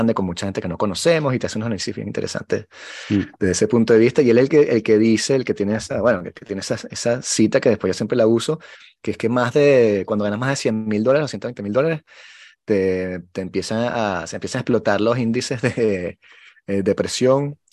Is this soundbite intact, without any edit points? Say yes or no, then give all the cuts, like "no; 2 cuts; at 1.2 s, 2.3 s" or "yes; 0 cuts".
yes; 0 cuts